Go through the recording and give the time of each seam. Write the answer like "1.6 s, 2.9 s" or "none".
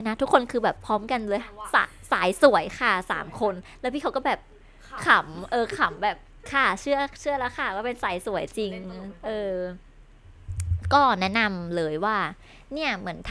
none